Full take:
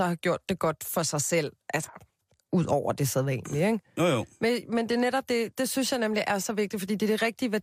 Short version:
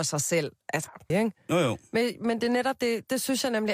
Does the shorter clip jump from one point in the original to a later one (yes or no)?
yes